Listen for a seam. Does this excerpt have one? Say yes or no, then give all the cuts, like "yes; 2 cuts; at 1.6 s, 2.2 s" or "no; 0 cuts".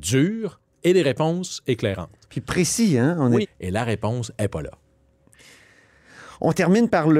yes; 1 cut; at 3.4 s